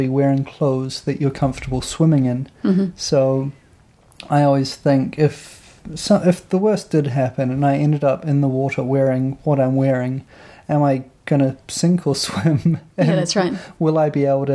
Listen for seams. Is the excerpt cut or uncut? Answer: uncut